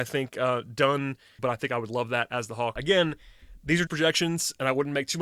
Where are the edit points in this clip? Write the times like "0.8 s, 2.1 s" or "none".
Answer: 1.4 s, 2.8 s, 3.9 s